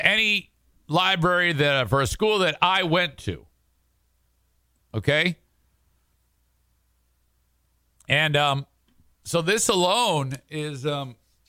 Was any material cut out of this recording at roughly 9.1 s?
no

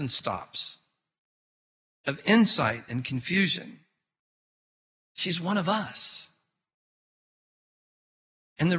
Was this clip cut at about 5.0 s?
yes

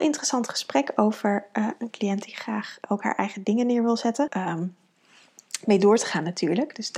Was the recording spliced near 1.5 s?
no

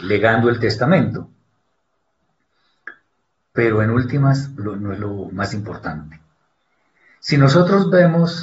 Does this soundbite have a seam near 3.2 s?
no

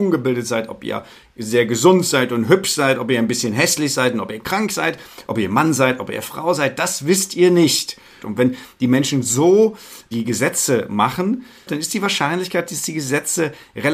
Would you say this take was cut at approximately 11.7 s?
yes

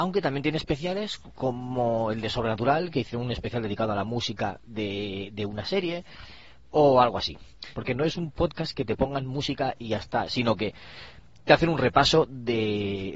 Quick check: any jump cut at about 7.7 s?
yes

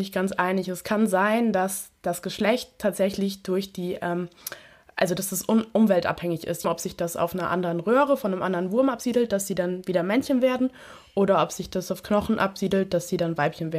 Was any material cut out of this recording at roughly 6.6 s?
yes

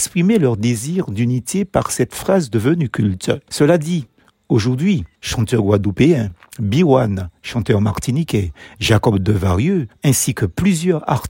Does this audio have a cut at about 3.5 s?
yes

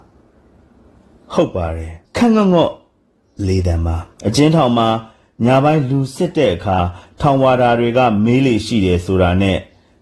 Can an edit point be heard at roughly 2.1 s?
yes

